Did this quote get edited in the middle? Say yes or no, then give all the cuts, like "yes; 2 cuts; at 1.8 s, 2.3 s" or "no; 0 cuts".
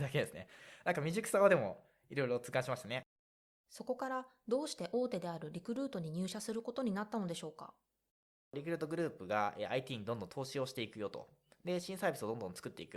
no; 0 cuts